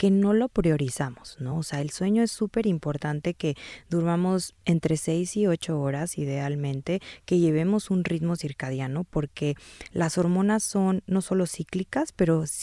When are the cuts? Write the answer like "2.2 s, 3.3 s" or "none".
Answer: none

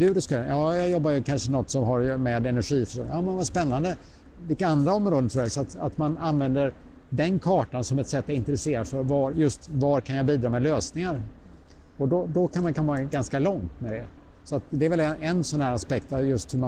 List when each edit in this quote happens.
none

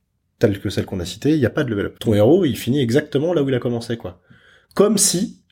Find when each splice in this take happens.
1.9 s

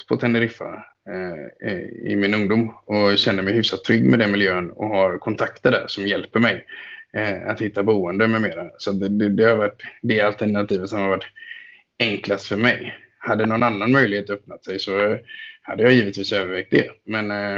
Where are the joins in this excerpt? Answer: none

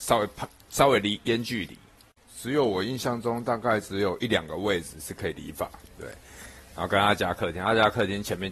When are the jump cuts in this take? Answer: 1.2 s, 5.9 s

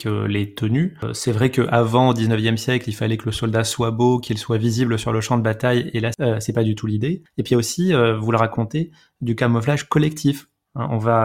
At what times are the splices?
none

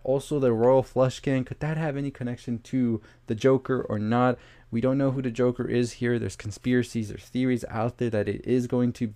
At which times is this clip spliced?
none

